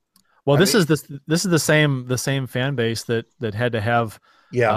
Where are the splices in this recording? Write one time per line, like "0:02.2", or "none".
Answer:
none